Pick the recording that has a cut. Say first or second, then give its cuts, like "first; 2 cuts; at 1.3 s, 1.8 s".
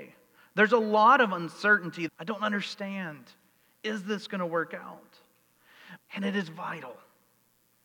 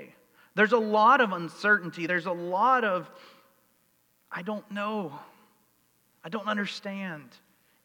first; 2 cuts; at 2.1 s, 6.0 s